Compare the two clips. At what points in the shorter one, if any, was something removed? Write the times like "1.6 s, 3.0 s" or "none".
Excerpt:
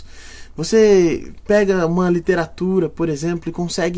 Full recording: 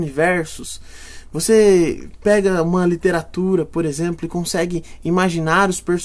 none

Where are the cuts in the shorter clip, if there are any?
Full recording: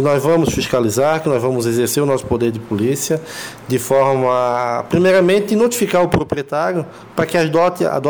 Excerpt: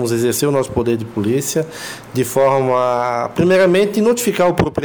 none

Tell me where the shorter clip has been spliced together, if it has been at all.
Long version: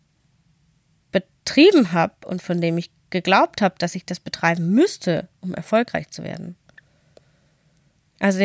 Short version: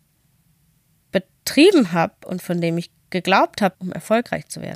3.7 s

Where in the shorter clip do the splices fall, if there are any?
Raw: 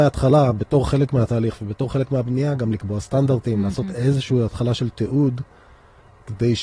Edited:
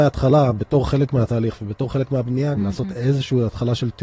2.6 s

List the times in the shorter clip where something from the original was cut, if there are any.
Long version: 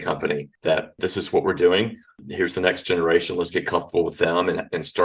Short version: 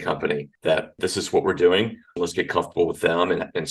2.2 s

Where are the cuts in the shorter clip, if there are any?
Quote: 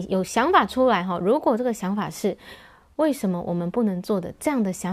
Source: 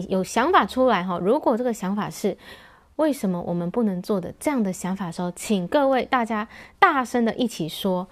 none

